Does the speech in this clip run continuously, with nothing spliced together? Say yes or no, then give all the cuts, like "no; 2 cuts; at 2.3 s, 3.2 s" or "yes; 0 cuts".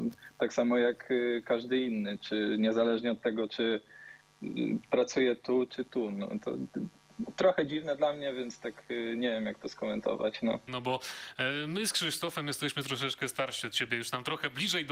no; 2 cuts; at 5.7 s, 10.7 s